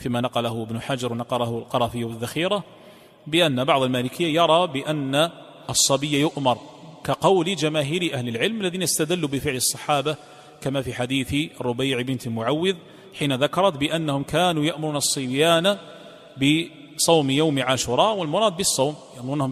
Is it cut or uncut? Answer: uncut